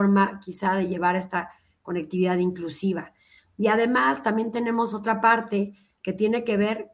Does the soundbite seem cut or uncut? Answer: uncut